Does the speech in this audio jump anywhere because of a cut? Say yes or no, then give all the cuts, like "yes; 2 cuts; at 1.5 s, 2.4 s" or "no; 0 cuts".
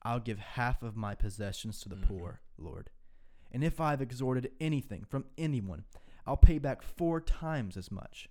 no; 0 cuts